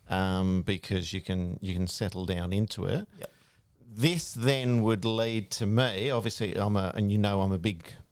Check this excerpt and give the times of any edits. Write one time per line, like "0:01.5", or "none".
none

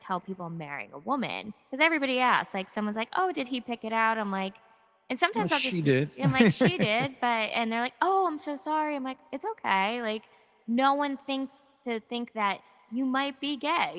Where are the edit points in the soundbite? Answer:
none

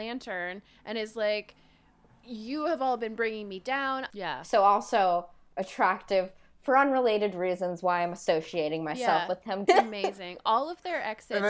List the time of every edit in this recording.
0:04.1
0:09.7

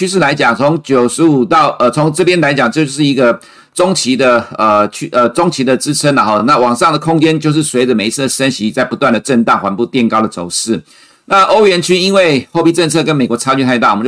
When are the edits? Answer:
none

